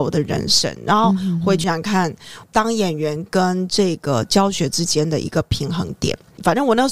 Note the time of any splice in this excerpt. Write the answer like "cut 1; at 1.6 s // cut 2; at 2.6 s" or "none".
cut 1; at 1.6 s

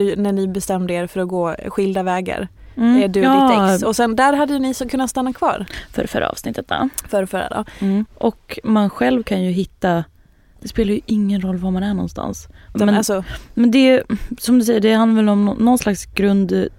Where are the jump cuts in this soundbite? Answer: cut 1; at 8.1 s // cut 2; at 12.7 s

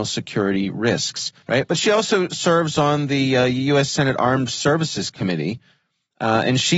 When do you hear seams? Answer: cut 1; at 1.4 s

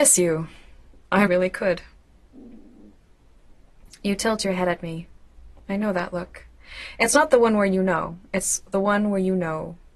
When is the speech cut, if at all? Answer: cut 1; at 1.3 s

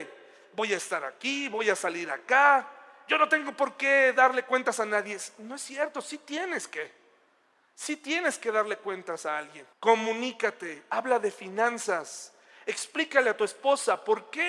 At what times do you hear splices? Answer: cut 1; at 9.7 s

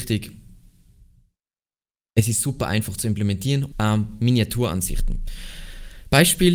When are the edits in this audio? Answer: cut 1; at 3.7 s

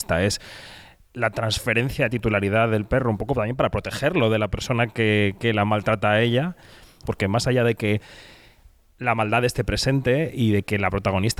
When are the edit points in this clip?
cut 1; at 7.0 s

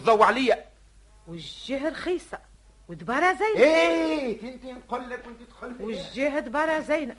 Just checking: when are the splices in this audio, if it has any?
none

